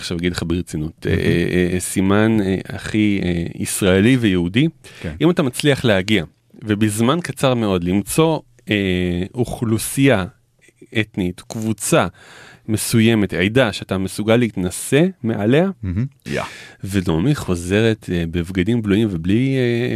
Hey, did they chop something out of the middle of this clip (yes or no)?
yes